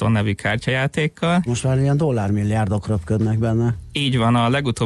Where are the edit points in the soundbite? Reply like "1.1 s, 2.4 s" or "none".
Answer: 1.5 s